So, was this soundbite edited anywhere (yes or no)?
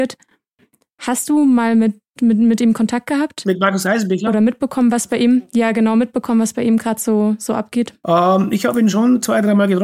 no